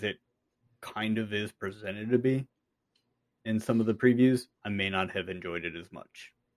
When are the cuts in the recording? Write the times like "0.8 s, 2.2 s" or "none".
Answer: 4.5 s